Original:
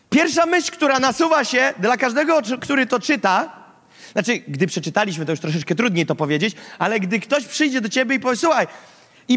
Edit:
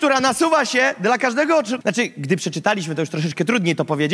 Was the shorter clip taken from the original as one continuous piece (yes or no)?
no